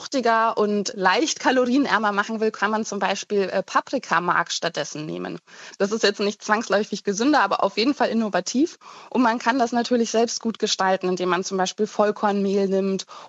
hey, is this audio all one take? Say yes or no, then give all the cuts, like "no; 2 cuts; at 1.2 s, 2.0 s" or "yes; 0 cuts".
no; 1 cut; at 5.7 s